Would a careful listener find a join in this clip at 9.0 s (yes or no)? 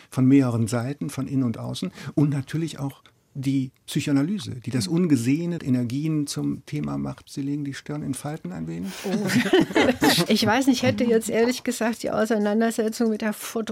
no